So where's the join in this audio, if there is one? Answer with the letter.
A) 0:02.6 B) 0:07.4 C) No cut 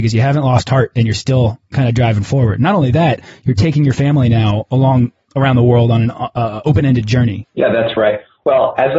B